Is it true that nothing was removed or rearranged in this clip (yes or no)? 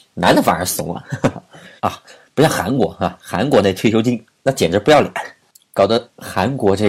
no